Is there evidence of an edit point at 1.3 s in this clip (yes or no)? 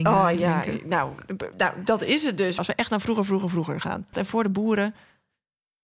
no